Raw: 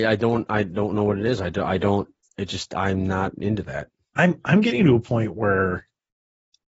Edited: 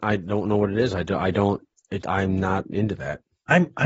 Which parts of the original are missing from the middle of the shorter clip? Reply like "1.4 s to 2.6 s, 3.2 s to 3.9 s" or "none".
2.5 s to 2.7 s